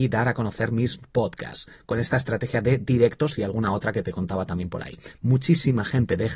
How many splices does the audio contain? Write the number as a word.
one